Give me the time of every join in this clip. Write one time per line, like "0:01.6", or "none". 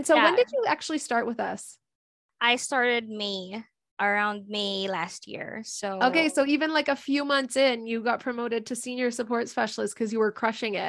none